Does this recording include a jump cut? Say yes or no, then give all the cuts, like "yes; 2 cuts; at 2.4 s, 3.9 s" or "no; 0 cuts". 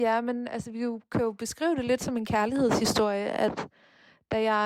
no; 0 cuts